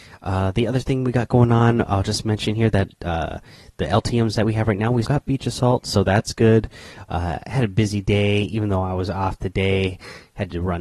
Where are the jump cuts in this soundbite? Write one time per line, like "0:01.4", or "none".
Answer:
0:05.0
0:07.1